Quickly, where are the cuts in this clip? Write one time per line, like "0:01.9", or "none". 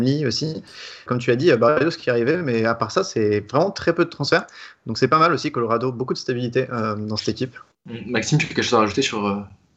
0:01.1
0:07.7